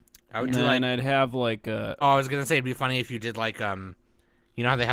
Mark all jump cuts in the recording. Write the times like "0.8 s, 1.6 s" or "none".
2.0 s